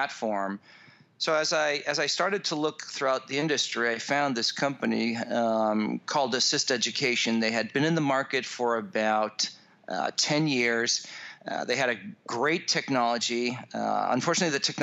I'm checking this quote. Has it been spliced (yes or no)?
no